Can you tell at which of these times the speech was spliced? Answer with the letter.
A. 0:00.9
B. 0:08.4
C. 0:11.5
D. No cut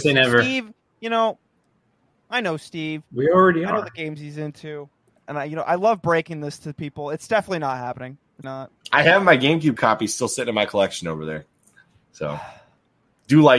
B